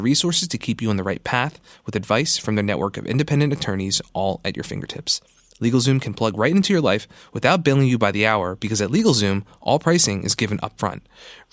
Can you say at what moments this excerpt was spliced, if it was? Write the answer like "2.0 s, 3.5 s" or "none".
none